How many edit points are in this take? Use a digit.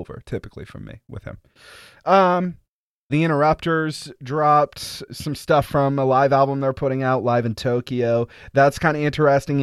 2